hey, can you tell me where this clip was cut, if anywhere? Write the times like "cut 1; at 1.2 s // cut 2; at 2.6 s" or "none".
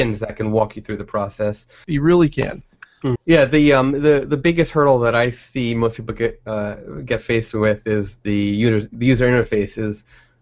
cut 1; at 1.8 s // cut 2; at 3.2 s